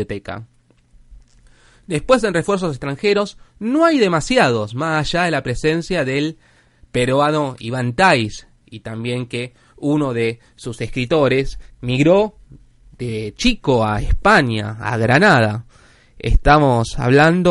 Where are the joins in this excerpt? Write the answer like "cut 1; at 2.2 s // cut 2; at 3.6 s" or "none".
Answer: cut 1; at 11.7 s